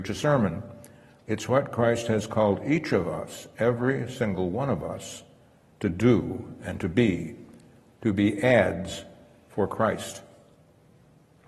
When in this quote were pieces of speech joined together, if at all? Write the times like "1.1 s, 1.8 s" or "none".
1.2 s